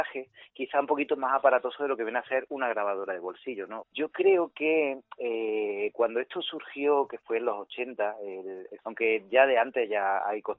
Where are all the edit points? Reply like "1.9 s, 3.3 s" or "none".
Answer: 3.8 s, 8.8 s